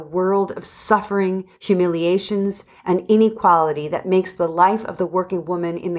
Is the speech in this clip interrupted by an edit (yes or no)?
no